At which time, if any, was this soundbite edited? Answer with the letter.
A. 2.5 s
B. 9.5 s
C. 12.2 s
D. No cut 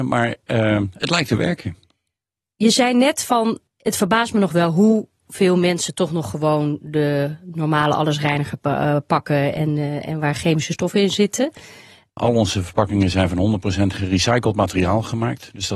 C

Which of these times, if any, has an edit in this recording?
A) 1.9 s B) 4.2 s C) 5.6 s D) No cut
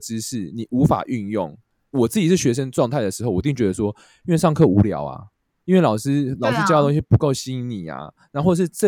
A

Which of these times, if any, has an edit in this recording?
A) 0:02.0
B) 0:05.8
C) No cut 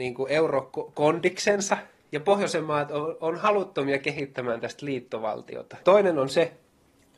B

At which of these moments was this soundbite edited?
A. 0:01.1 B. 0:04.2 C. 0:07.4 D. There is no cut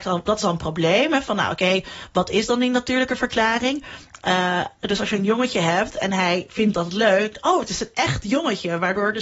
B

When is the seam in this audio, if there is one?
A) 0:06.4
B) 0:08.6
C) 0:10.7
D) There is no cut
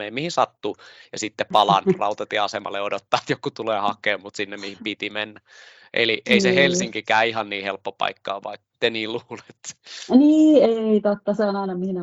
B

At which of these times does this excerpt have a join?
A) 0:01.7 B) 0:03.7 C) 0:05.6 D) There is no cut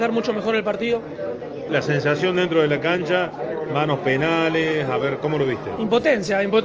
A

